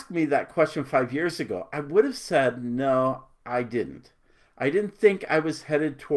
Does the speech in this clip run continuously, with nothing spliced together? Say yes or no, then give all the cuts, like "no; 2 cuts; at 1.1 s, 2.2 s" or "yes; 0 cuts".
yes; 0 cuts